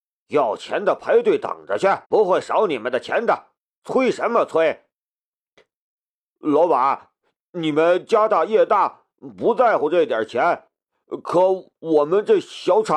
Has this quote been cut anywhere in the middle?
yes; 1 cut; at 2.0 s

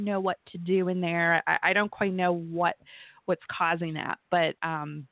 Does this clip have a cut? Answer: no; 0 cuts

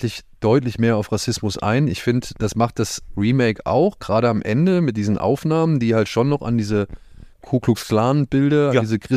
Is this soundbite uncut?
yes; 0 cuts

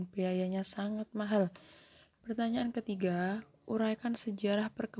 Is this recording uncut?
no; 1 cut; at 2.1 s

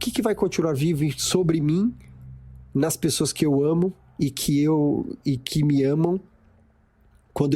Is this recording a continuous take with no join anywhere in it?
yes; 0 cuts

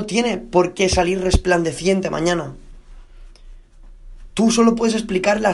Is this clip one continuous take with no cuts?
yes; 0 cuts

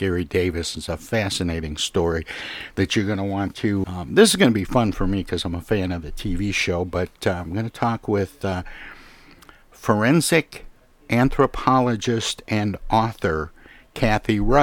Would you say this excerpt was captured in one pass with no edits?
no; 1 cut; at 3.8 s

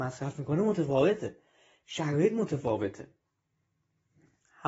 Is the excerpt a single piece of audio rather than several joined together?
yes; 0 cuts

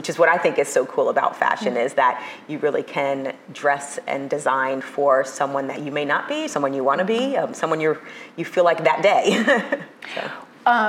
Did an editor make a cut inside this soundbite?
no; 0 cuts

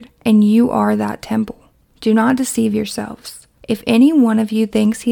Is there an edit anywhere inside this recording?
no; 0 cuts

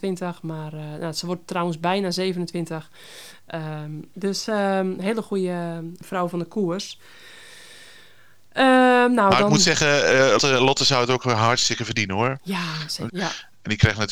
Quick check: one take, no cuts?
no; 2 cuts; at 10.4 s, 13.1 s

